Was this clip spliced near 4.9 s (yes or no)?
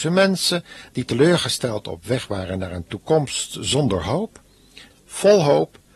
yes